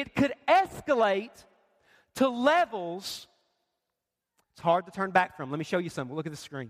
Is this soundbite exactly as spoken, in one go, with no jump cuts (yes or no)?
yes